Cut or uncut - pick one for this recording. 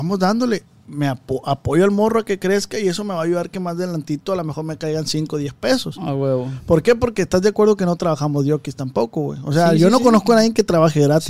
uncut